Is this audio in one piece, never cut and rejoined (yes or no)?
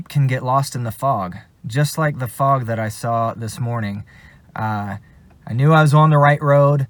yes